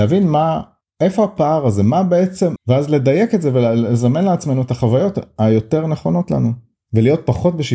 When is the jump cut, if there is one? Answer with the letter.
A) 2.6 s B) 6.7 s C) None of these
A